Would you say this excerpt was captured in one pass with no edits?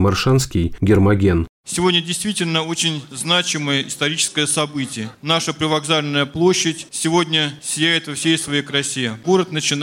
no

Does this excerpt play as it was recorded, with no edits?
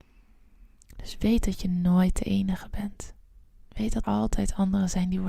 no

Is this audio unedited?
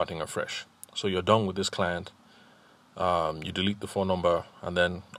yes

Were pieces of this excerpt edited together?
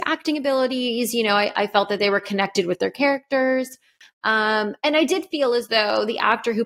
no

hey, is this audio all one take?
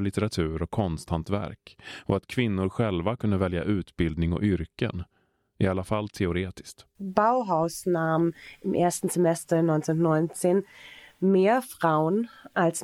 yes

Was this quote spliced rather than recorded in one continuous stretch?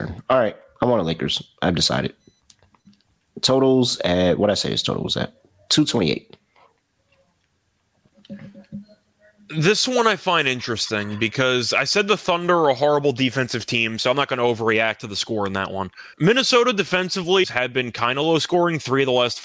yes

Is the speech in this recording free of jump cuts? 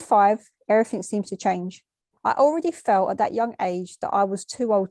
no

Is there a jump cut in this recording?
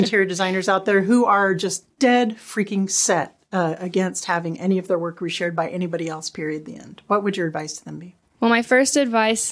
no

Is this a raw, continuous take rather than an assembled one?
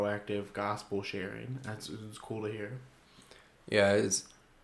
yes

